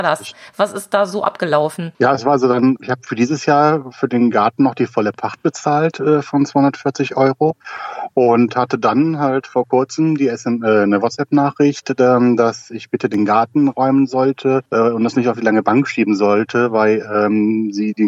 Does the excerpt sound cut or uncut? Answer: cut